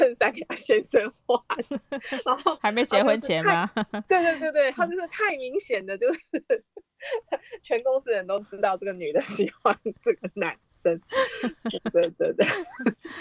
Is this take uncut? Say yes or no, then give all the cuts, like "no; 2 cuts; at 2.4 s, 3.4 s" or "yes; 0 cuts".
yes; 0 cuts